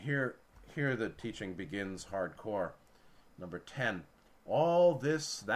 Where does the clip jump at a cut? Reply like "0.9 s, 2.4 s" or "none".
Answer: none